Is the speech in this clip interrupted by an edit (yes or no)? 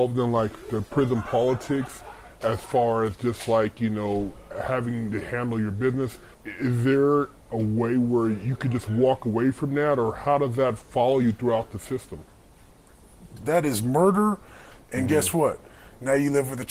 yes